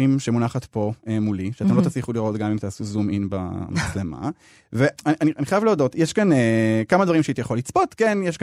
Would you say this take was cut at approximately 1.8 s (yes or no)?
no